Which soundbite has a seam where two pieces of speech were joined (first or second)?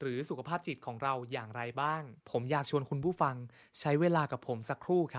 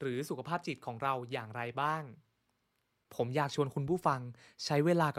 first